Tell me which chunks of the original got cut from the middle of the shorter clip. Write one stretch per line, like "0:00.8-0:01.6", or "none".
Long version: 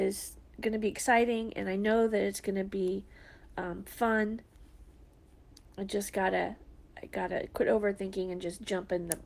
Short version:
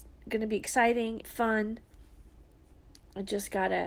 0:01.5-0:03.8